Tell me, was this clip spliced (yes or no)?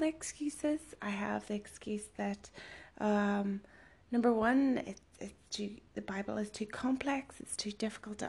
no